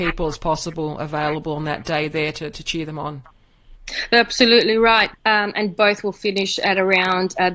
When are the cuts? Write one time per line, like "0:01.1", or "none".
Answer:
0:05.1